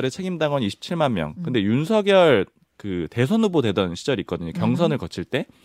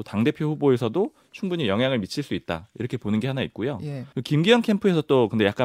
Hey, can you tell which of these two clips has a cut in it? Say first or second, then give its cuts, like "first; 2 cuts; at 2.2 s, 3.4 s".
second; 1 cut; at 4.1 s